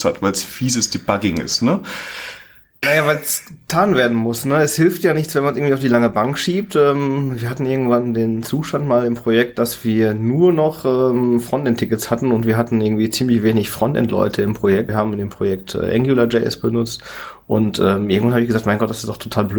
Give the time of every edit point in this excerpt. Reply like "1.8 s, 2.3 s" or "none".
2.8 s, 14.9 s